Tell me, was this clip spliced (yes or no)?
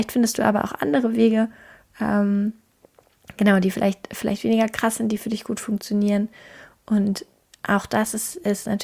no